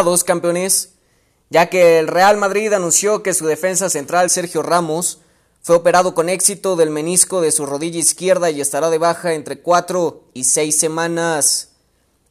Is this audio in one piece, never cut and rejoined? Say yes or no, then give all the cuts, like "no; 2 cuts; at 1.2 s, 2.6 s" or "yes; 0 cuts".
yes; 0 cuts